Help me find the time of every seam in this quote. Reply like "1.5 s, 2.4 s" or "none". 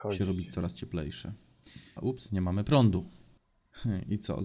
2.0 s

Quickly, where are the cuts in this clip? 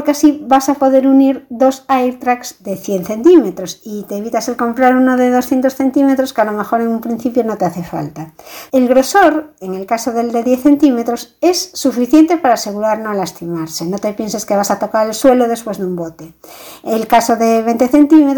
8.7 s

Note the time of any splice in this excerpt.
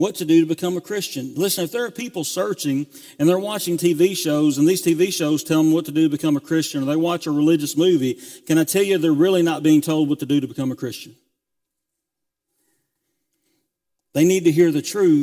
none

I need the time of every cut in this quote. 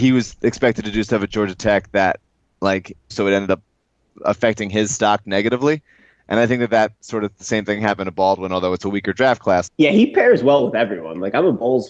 3.1 s, 9.7 s

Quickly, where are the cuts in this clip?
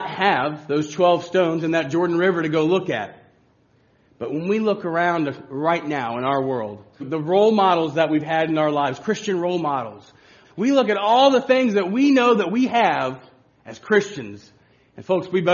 7.0 s, 10.4 s

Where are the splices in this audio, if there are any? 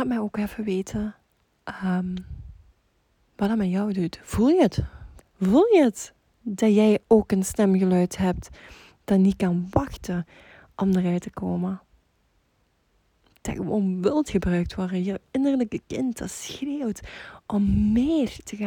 5.2 s

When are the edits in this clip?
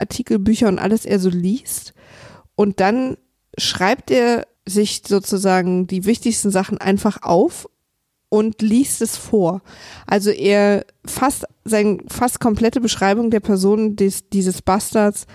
none

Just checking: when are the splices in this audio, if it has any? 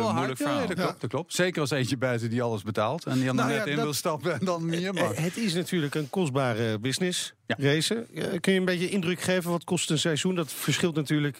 none

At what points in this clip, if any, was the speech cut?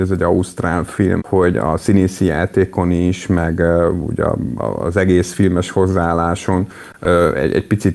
1.2 s

